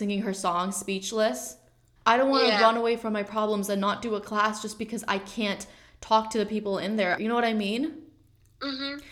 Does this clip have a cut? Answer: yes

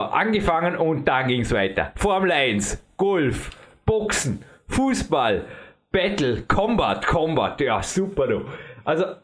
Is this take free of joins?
yes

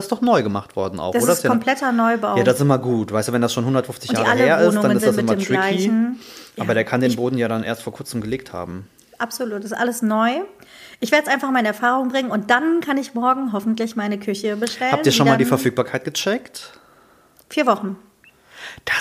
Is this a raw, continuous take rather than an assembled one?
yes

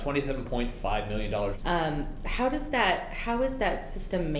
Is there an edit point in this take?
yes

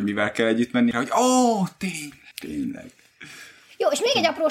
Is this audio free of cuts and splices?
no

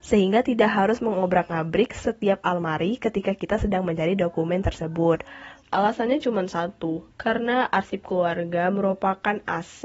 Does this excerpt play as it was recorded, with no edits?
no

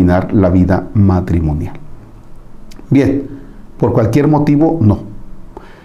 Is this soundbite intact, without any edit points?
yes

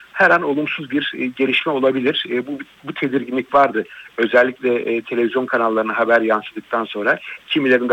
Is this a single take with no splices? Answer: yes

